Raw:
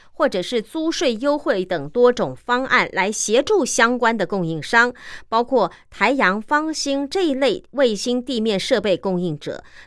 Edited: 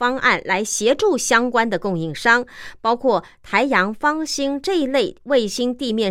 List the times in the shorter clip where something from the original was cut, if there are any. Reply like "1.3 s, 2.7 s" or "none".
none